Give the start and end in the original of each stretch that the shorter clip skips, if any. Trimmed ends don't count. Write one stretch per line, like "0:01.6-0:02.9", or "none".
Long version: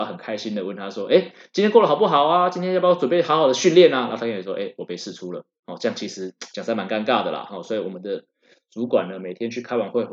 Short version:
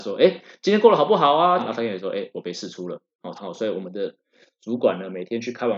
0:02.5-0:04.0
0:05.8-0:07.4